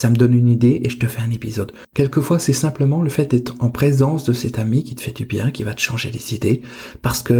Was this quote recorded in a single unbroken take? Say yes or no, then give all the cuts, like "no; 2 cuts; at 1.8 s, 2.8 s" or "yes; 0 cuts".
no; 1 cut; at 1.8 s